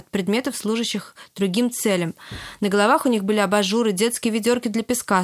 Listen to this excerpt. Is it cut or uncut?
uncut